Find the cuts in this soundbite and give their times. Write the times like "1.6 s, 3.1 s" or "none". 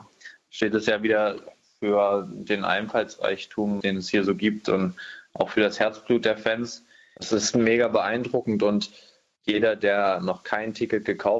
3.8 s